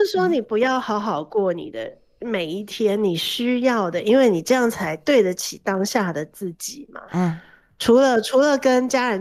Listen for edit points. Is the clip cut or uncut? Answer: cut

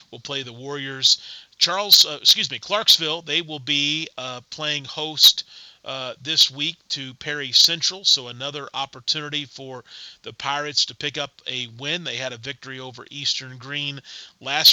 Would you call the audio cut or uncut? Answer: uncut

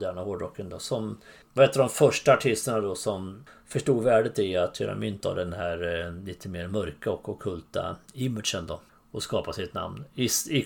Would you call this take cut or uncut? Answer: uncut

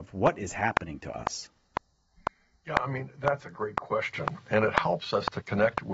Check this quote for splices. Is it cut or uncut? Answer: uncut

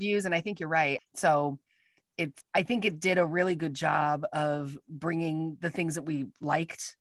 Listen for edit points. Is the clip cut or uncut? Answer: cut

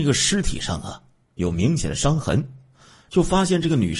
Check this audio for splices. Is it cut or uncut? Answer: cut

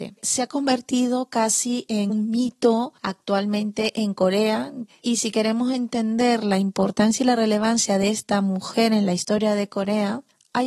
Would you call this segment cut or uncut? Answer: cut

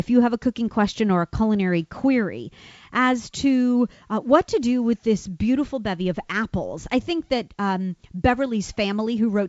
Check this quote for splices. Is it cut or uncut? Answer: uncut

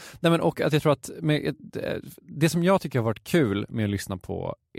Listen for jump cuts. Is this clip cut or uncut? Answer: uncut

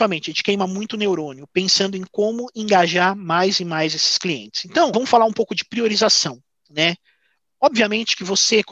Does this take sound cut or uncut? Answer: cut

